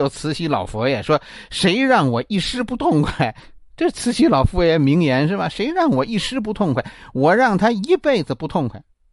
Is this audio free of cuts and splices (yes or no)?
yes